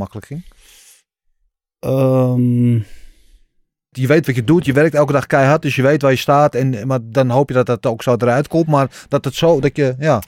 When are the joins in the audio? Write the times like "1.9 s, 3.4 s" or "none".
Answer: 3.9 s

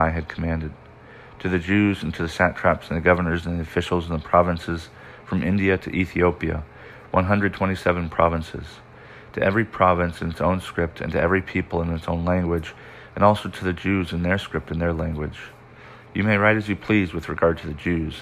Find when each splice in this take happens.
16.0 s

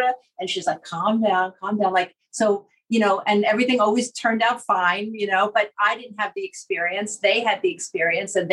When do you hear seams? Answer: none

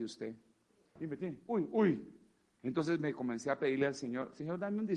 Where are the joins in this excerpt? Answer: 1.0 s, 2.6 s

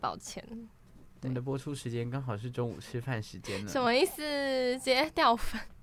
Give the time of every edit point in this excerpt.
none

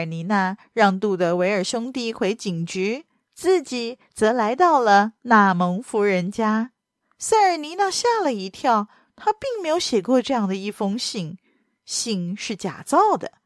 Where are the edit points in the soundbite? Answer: 7.0 s

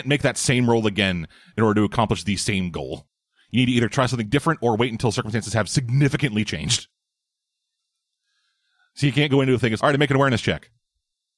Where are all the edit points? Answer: 9.8 s

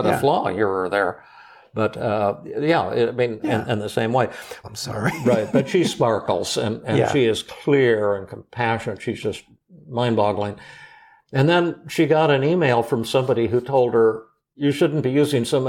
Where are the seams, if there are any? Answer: 3.4 s, 4.6 s

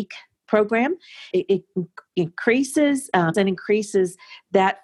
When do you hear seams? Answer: 1.3 s, 3.3 s

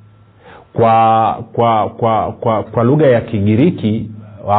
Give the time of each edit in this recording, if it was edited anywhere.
2.6 s

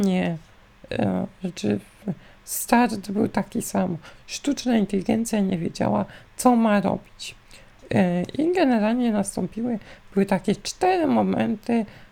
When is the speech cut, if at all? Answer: none

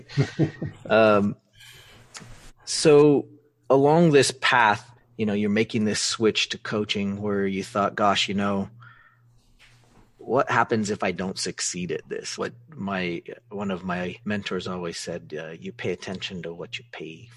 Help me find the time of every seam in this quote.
5.0 s, 12.4 s, 14.2 s

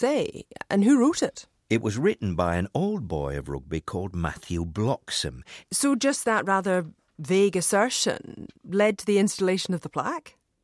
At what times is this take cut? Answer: 5.6 s, 8.5 s

